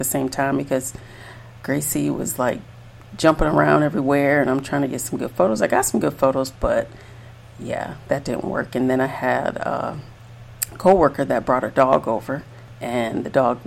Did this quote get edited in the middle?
no; 0 cuts

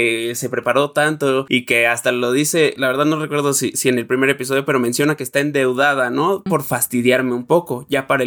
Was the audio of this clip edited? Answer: yes; 1 cut; at 6.5 s

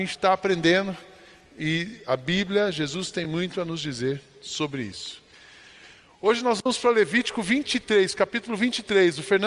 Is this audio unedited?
yes; 0 cuts

